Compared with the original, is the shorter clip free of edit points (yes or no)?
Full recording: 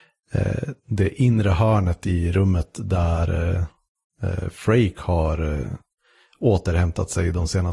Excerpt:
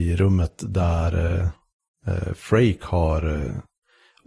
yes